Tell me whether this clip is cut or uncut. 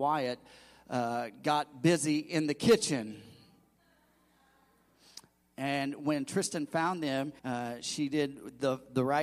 cut